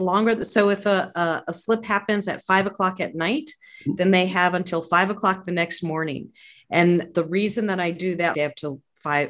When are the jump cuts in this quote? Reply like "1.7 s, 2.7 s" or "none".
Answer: 7.1 s, 8.3 s